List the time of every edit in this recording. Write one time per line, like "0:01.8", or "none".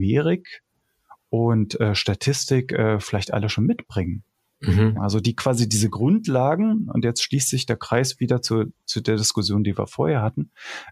0:04.9